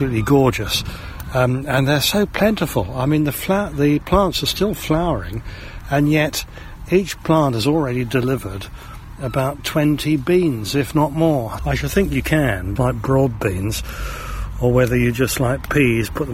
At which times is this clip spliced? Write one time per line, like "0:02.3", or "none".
0:11.6
0:12.8